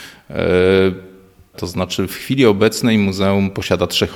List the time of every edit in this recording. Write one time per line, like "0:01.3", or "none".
0:01.5